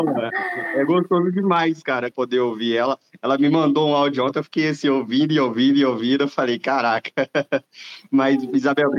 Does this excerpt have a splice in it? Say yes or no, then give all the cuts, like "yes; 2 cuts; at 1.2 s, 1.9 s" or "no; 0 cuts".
yes; 1 cut; at 2.1 s